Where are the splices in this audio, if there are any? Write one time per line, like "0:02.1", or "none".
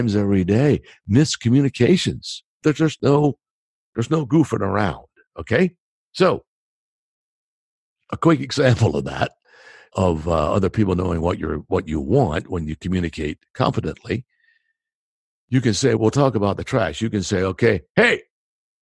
0:02.5
0:16.0